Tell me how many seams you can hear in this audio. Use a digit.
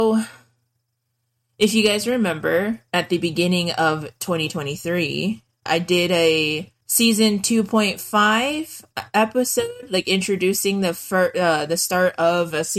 2